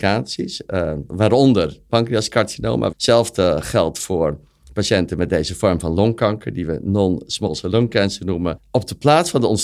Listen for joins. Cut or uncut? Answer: cut